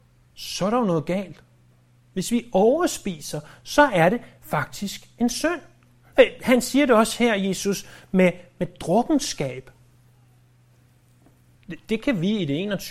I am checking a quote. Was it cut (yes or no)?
yes